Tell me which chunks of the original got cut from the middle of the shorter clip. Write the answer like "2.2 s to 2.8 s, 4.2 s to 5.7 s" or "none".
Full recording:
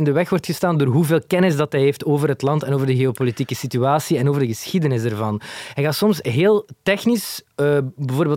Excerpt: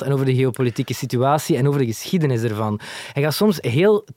none